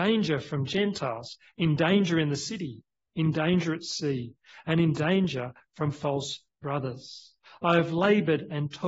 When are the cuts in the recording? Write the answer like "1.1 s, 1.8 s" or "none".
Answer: 3.1 s